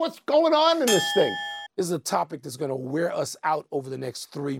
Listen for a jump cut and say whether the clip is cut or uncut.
cut